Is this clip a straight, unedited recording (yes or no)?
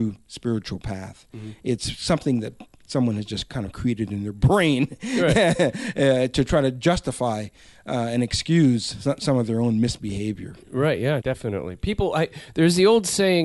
no